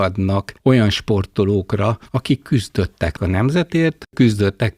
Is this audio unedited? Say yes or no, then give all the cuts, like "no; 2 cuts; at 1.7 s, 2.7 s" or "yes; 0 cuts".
no; 1 cut; at 2.1 s